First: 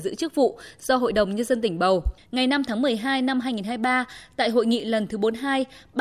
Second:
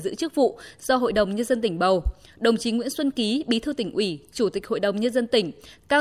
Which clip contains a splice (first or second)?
first